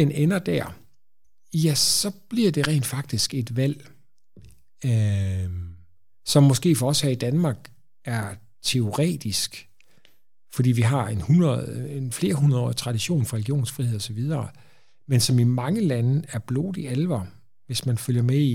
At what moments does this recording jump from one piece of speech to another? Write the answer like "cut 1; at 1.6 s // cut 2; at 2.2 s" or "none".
none